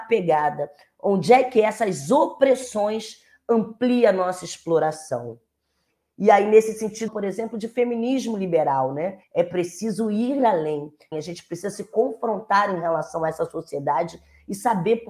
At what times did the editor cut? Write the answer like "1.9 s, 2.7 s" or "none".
7.1 s, 9.2 s, 11.1 s